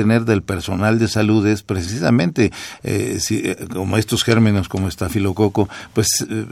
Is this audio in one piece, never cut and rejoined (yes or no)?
yes